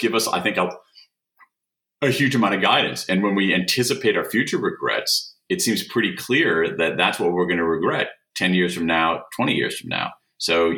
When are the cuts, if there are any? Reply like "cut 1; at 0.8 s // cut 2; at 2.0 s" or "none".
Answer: none